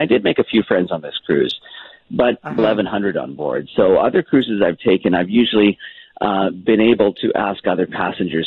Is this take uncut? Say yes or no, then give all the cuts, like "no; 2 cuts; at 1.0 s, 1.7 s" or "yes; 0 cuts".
no; 1 cut; at 2.6 s